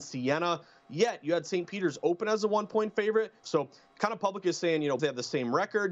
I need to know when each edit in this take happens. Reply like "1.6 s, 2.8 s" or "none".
3.4 s, 5.0 s